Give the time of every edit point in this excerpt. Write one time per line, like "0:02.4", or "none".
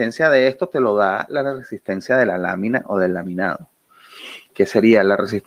0:04.5